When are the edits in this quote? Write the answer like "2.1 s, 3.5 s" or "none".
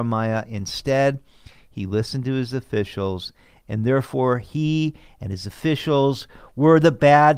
none